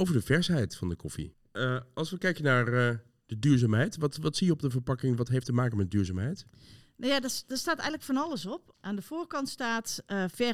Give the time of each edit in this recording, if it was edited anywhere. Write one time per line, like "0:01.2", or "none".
0:08.7